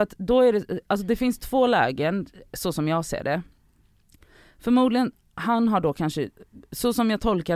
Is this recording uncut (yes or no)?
yes